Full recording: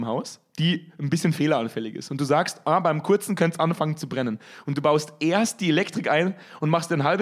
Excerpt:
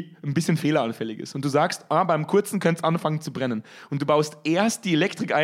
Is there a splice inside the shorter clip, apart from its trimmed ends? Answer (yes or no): no